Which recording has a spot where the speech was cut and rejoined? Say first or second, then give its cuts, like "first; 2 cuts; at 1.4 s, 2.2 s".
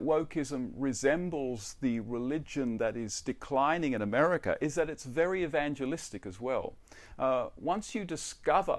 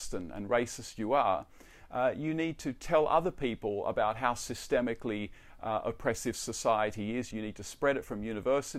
second; 1 cut; at 7.3 s